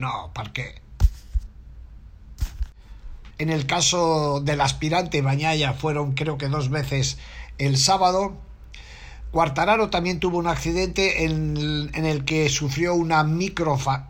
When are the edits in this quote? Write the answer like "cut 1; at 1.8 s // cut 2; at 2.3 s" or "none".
cut 1; at 3.3 s